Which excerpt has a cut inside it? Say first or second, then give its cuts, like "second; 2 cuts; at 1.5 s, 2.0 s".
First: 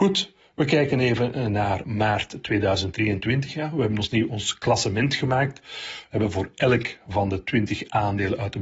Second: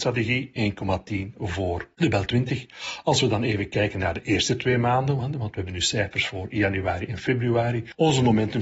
first; 1 cut; at 1.8 s